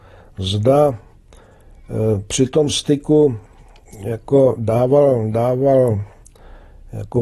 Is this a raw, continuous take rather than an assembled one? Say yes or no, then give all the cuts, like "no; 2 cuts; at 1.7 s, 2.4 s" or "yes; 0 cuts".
yes; 0 cuts